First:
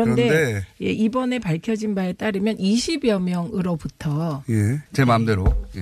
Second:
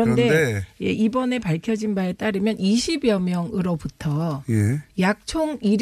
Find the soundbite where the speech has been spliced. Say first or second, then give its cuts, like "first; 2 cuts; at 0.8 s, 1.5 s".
first; 1 cut; at 4.9 s